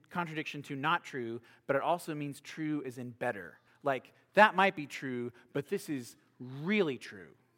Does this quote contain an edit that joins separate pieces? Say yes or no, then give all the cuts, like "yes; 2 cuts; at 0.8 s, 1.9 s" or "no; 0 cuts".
no; 0 cuts